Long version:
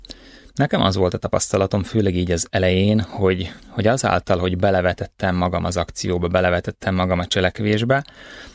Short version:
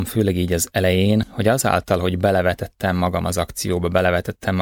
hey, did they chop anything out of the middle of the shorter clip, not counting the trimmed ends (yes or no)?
yes